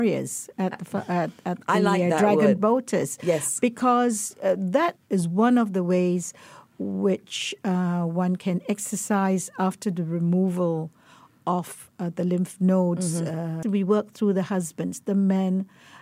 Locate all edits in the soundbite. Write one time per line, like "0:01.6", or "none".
0:05.0
0:13.6